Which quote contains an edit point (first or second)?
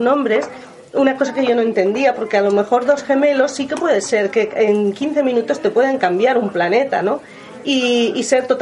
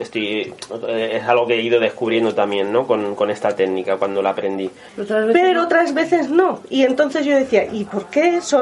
second